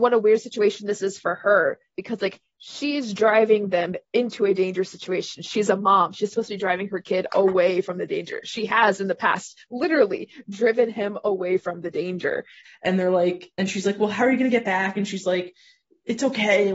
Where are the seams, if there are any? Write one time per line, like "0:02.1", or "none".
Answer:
0:12.6